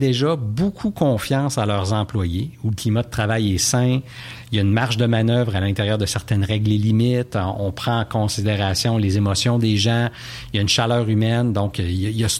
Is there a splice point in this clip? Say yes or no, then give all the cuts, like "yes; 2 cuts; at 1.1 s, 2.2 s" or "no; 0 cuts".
no; 0 cuts